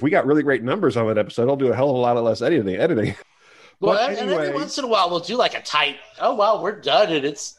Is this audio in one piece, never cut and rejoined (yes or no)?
no